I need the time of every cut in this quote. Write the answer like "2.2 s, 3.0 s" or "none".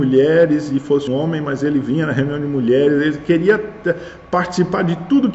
1.1 s